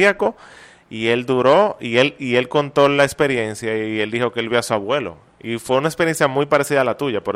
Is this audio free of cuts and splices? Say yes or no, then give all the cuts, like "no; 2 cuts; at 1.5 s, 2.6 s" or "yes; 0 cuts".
yes; 0 cuts